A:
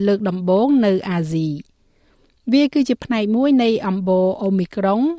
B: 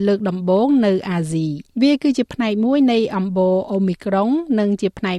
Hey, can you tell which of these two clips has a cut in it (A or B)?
B